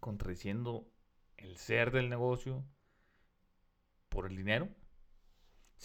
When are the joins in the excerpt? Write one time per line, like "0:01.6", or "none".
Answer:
none